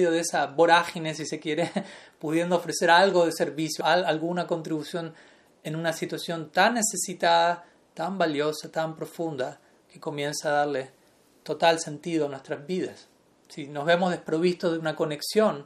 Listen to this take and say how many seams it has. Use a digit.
1